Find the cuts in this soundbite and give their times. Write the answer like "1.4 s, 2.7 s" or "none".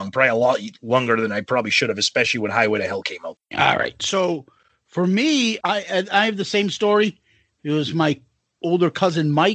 3.4 s, 5.6 s